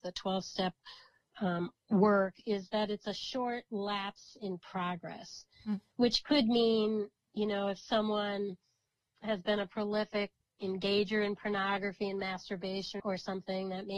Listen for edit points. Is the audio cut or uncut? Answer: cut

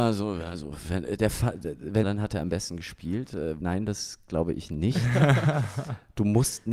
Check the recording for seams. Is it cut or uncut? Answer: cut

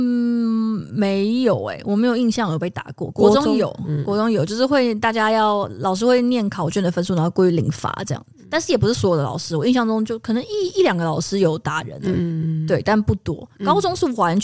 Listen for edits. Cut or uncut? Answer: uncut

